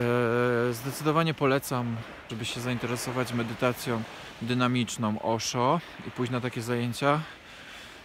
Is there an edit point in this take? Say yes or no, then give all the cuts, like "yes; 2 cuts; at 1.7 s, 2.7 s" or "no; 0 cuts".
yes; 1 cut; at 2.3 s